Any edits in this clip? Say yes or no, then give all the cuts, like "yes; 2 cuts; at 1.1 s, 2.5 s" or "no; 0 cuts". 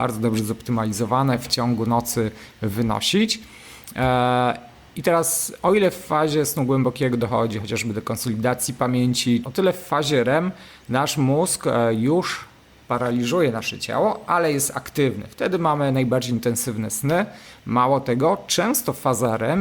yes; 1 cut; at 9.4 s